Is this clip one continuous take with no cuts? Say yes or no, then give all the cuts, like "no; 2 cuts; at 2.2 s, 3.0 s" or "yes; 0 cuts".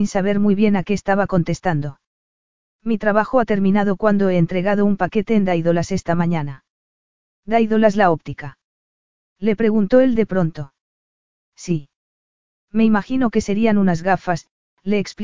yes; 0 cuts